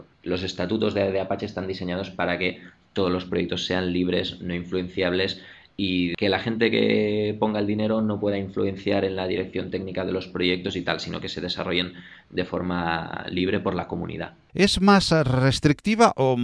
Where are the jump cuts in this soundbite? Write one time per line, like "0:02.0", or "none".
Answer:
0:14.5